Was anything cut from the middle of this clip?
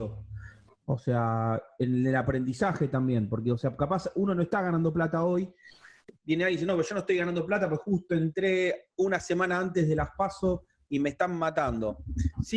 no; 0 cuts

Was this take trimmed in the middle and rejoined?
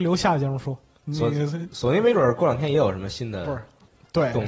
no; 0 cuts

